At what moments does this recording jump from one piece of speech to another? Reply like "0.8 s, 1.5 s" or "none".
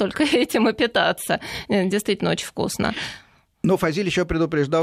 none